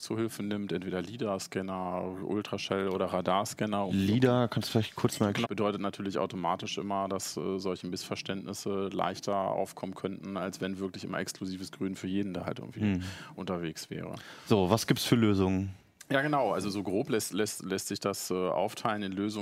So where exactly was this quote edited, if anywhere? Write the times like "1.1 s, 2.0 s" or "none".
5.4 s